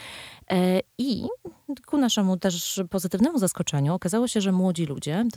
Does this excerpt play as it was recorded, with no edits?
yes; 0 cuts

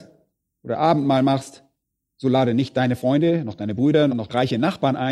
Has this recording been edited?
yes; 1 cut; at 4.1 s

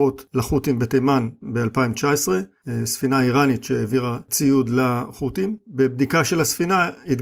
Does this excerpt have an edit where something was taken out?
no; 0 cuts

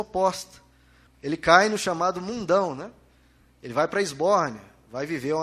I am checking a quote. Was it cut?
yes; 1 cut; at 1.1 s

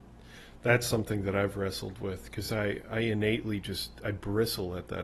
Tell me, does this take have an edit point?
no; 0 cuts

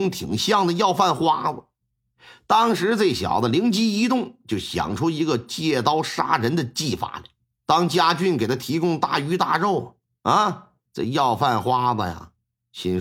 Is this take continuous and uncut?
no; 2 cuts; at 7.6 s, 10.8 s

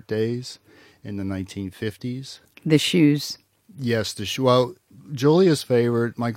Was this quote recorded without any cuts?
yes; 0 cuts

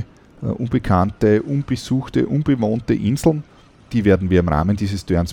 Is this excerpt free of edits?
yes; 0 cuts

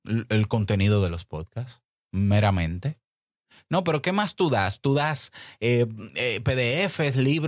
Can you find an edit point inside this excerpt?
no; 0 cuts

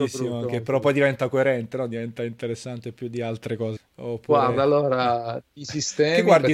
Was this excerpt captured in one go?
no; 1 cut; at 3.8 s

